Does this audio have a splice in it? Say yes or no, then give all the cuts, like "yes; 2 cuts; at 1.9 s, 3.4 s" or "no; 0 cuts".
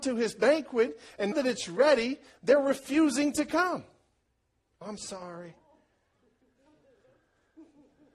yes; 2 cuts; at 1.3 s, 4.8 s